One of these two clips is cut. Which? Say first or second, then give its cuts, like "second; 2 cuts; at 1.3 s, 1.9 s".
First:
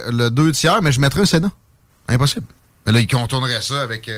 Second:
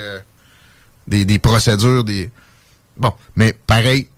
first; 1 cut; at 1.9 s